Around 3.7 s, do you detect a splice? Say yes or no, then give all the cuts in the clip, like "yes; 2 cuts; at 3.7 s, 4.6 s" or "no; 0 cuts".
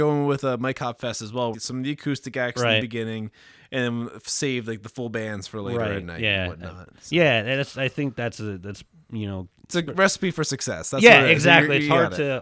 no; 1 cut; at 1.5 s